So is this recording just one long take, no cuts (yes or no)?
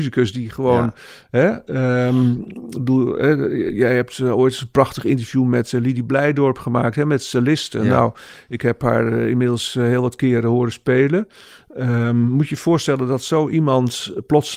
yes